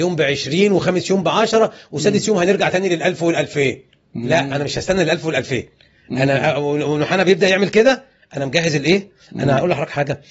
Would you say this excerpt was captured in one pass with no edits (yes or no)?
yes